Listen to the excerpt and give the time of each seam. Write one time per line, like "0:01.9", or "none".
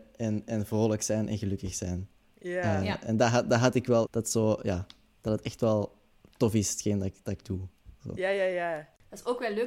0:04.1